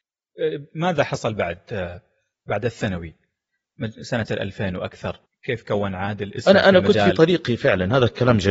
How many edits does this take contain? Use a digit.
1